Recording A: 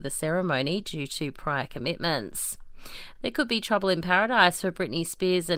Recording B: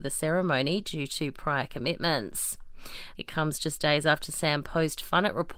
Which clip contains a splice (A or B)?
B